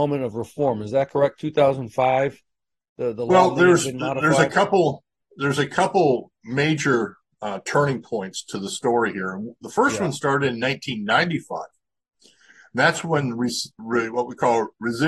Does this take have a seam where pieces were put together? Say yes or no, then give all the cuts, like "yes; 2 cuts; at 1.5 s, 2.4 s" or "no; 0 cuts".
no; 0 cuts